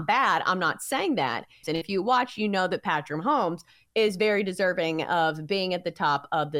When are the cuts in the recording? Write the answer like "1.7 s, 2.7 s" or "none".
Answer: 1.6 s

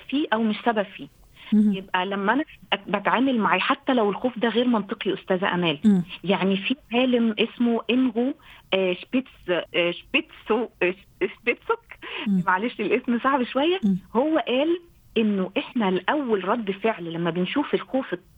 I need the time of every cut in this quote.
9.7 s

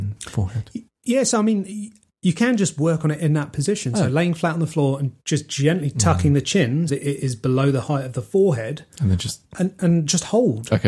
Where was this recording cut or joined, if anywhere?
6.9 s

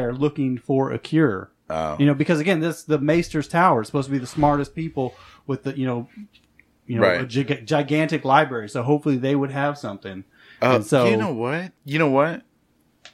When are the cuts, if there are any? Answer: 11.8 s

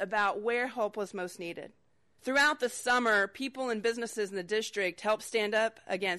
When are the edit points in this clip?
2.1 s

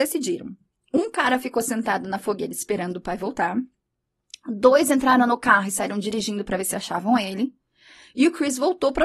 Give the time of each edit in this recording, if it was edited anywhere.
none

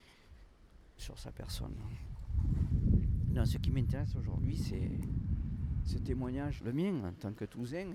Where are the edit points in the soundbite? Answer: 6.6 s

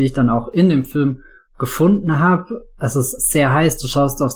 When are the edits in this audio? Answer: 3.2 s

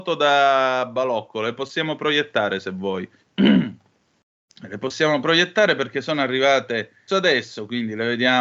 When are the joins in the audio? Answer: 3.2 s, 7.1 s

